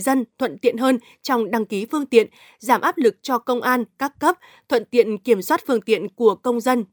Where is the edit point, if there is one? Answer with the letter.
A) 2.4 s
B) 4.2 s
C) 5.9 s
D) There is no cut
D